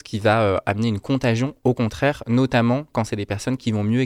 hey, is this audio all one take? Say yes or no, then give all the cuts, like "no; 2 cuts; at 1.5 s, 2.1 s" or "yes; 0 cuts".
yes; 0 cuts